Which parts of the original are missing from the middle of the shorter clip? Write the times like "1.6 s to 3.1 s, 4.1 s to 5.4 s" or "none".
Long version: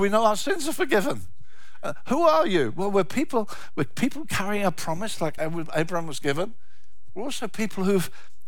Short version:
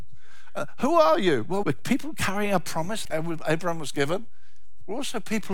2.9 s to 3.7 s, 5.2 s to 5.3 s

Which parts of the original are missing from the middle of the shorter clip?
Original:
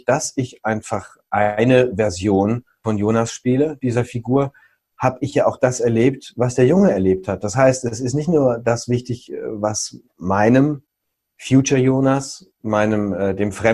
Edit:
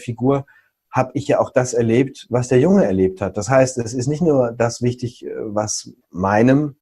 none

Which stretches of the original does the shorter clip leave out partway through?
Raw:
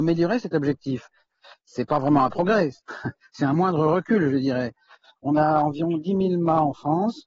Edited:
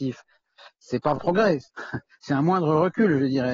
2.0 s to 2.3 s

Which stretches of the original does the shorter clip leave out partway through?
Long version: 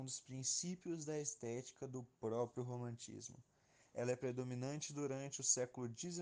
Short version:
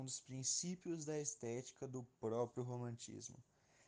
none

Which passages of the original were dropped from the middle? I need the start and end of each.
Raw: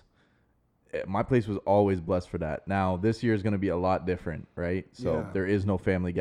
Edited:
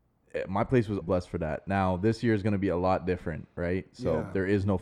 1.6 s to 2.0 s

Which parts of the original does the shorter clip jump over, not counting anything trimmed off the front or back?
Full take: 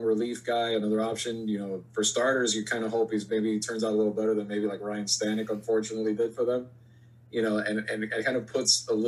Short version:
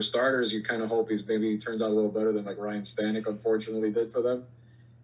4.5 s to 4.7 s

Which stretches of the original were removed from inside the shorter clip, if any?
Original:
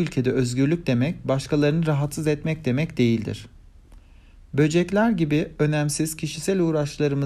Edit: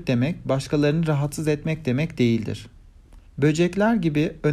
4.1 s to 4.4 s

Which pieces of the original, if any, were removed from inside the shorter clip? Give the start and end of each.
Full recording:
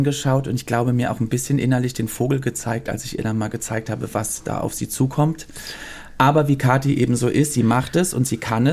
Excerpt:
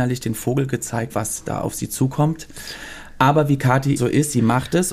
2.8 s to 4.1 s, 7.0 s to 7.2 s

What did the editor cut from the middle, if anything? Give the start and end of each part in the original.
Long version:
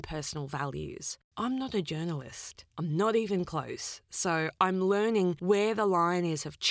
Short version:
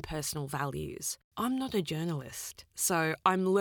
2.7 s to 4.0 s

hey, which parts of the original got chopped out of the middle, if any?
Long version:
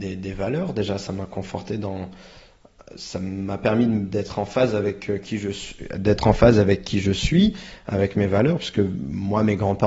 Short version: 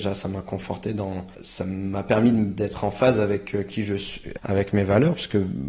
2.2 s to 2.9 s, 5.9 s to 7.8 s

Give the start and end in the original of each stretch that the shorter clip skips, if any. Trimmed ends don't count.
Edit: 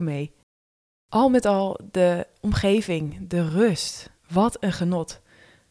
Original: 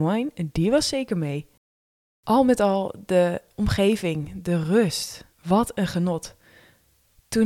none

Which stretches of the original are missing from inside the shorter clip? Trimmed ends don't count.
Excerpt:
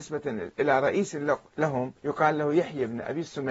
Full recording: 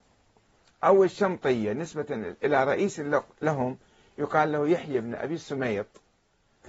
3.8 s to 4.1 s

